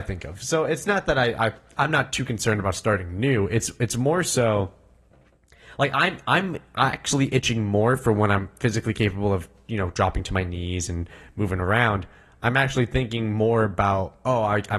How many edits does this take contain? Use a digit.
0